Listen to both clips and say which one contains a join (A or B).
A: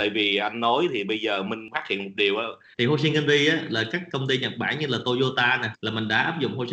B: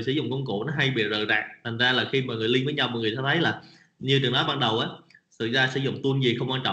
A